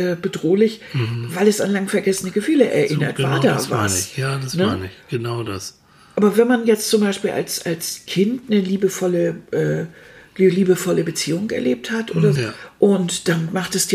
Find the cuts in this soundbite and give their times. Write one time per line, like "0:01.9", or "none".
0:12.3